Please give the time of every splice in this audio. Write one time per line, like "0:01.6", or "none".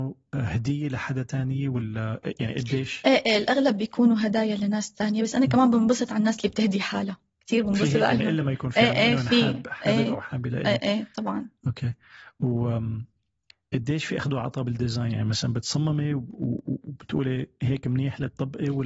none

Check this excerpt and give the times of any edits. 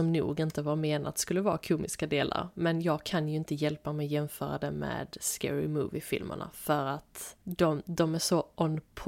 0:07.4

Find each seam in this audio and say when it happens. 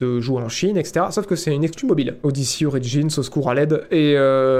0:02.2

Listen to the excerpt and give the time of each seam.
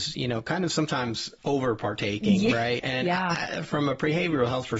0:02.8

